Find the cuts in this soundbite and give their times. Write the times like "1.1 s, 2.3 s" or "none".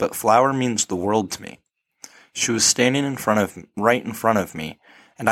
none